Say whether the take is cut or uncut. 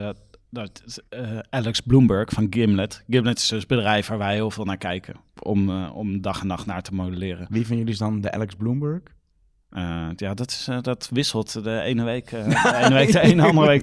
uncut